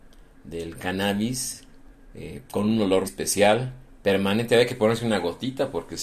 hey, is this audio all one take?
no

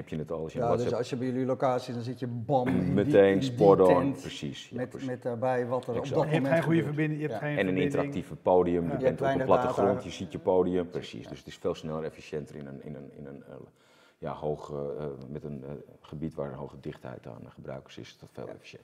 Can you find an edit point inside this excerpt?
yes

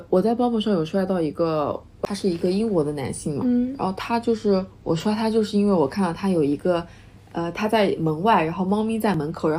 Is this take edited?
no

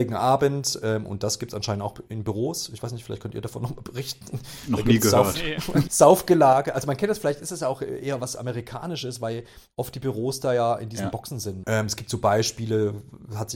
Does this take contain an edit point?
yes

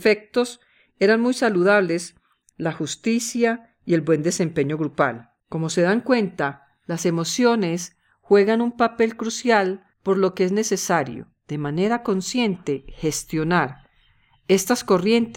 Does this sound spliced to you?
yes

